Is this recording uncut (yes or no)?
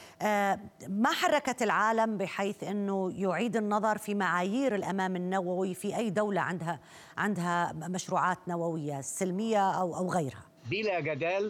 no